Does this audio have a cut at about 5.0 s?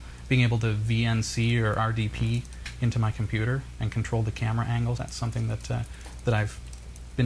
yes; 1 cut; at 5.0 s

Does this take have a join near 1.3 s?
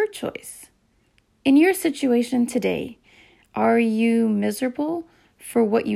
no; 0 cuts

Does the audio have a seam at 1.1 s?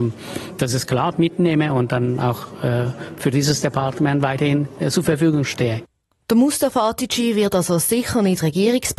yes; 1 cut; at 1.1 s

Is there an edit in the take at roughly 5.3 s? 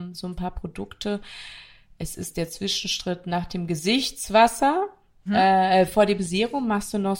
yes; 1 cut; at 5.3 s

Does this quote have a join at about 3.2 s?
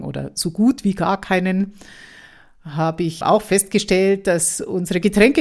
yes; 1 cut; at 3.2 s

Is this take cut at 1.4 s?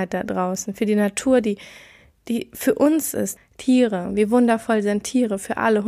no; 1 cut; at 3.4 s

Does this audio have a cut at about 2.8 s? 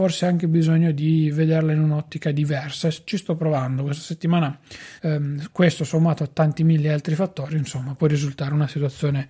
no; 2 cuts; at 5.0 s, 8.0 s

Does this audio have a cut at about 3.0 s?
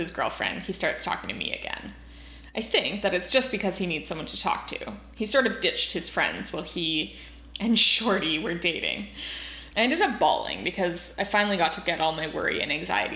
yes; 2 cuts; at 3.0 s, 9.7 s

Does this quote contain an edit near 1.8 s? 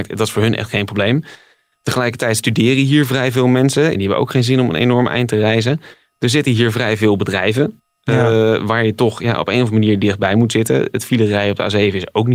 no; 1 cut; at 3.9 s

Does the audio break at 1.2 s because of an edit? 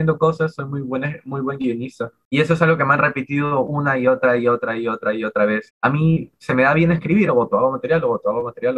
no; 2 cuts; at 5.7 s, 7.3 s

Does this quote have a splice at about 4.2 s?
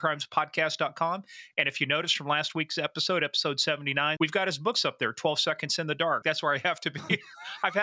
yes; 2 cuts; at 4.2 s, 6.2 s

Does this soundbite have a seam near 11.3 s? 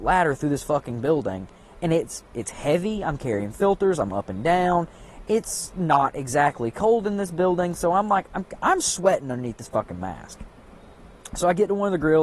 no; 0 cuts

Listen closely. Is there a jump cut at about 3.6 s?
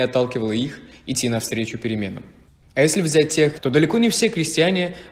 yes; 1 cut; at 3.6 s

